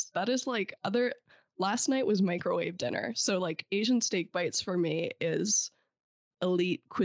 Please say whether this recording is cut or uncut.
uncut